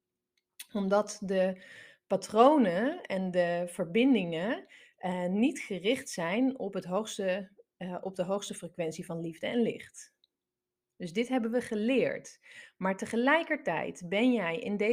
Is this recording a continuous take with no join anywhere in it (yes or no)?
yes